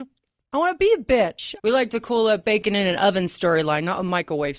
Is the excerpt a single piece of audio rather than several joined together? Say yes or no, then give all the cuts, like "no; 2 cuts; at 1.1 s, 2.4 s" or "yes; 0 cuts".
no; 1 cut; at 1.6 s